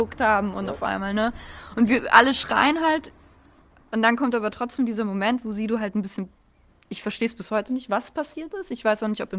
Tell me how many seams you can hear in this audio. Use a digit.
0